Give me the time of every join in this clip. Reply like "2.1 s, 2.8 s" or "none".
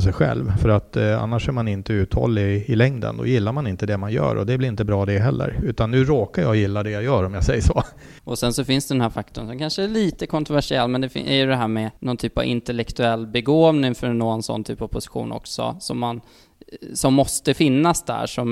8.2 s, 12.0 s